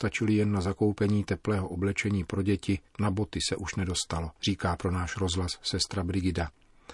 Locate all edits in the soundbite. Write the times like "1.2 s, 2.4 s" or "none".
2.9 s, 4.4 s

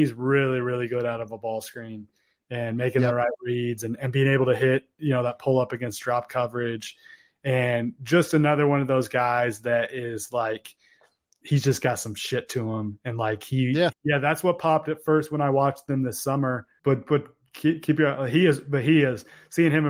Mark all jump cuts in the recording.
13.9 s, 16.8 s

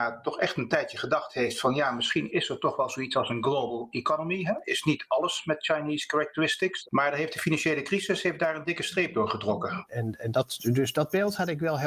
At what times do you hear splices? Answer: 6.8 s, 9.9 s

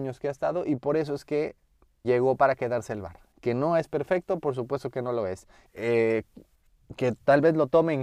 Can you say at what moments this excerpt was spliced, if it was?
2.0 s, 5.7 s

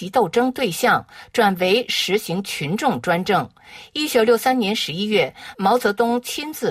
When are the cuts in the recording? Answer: none

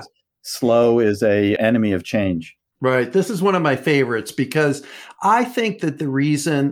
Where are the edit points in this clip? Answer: 1.6 s

